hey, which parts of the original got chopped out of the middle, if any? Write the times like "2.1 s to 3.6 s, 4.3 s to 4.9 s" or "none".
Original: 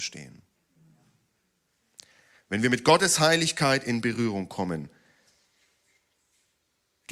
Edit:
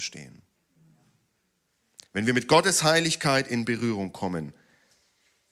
2.1 s to 2.4 s